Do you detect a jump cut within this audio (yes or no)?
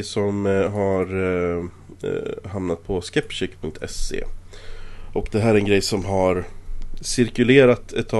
no